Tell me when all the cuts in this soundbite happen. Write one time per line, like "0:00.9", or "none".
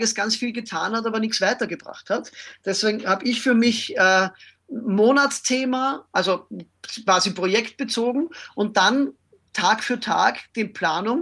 0:06.1